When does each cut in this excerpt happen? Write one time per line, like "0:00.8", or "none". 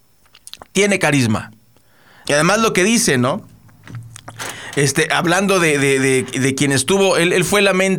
0:02.3